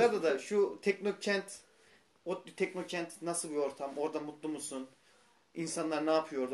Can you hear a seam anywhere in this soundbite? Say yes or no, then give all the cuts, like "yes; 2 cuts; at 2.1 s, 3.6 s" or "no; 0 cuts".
no; 0 cuts